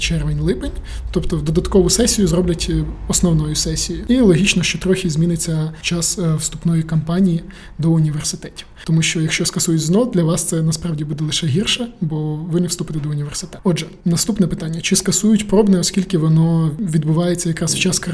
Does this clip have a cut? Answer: no; 0 cuts

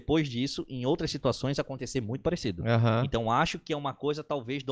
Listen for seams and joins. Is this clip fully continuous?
yes; 0 cuts

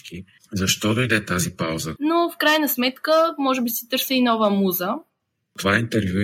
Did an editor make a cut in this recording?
yes; 1 cut; at 2.0 s

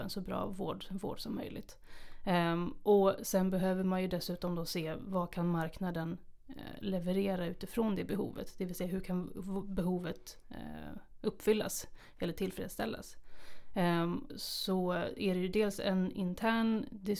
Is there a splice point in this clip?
yes; 1 cut; at 14.3 s

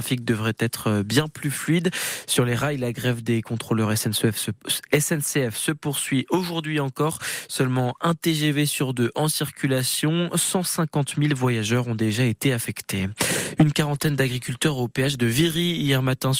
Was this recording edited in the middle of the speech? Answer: no; 0 cuts

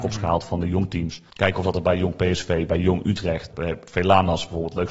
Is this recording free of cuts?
no; 2 cuts; at 1.3 s, 3.5 s

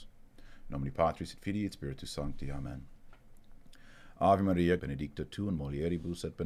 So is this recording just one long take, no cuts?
no; 1 cut; at 4.8 s

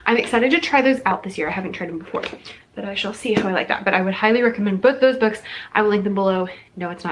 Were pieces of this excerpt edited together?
no; 0 cuts

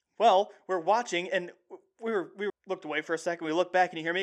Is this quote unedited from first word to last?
no; 1 cut; at 2.5 s

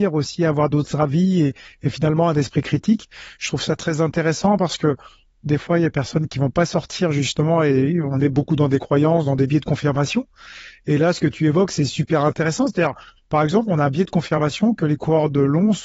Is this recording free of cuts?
yes; 0 cuts

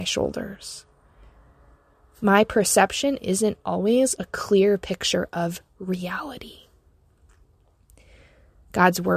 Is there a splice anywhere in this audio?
no; 0 cuts

